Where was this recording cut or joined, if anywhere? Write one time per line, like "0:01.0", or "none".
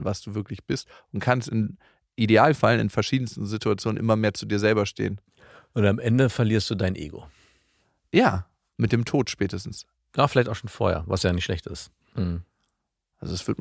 0:12.1